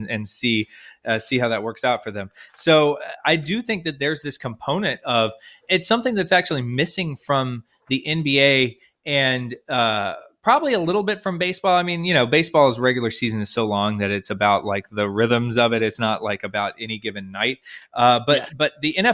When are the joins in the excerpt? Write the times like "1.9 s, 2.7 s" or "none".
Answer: none